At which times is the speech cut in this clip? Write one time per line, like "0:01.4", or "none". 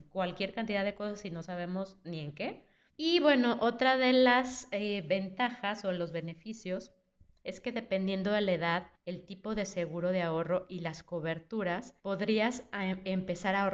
0:02.9
0:09.0
0:12.0